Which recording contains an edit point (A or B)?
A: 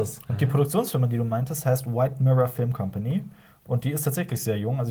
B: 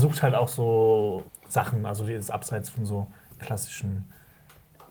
B